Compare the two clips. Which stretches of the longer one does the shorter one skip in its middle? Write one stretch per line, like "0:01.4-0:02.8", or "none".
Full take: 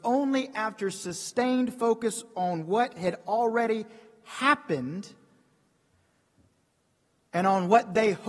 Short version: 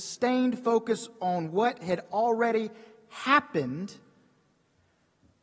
none